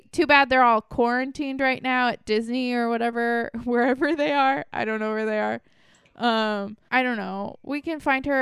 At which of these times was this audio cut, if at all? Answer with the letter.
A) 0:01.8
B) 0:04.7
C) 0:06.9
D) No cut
C